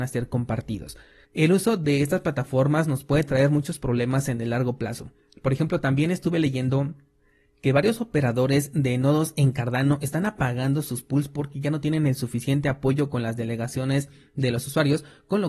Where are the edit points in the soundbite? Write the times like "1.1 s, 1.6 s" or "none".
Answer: 1.2 s